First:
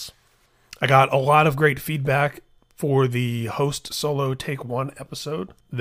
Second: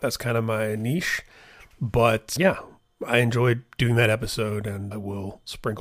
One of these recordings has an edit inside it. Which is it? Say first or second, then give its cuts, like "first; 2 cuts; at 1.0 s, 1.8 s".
second; 2 cuts; at 2.4 s, 4.9 s